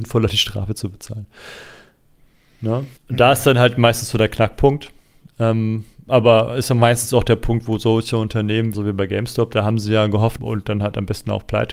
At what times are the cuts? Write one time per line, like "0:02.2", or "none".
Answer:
0:03.0
0:08.7
0:10.4